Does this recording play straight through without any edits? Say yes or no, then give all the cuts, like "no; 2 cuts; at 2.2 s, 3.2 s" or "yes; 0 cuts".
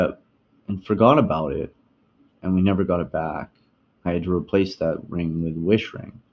yes; 0 cuts